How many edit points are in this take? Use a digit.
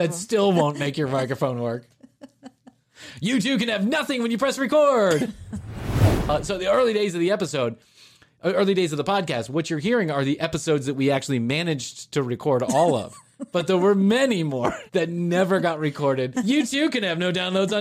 2